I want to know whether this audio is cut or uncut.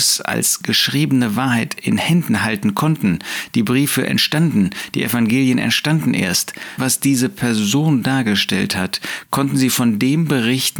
cut